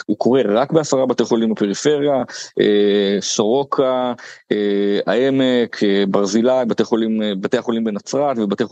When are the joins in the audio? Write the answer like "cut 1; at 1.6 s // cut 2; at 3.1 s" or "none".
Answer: none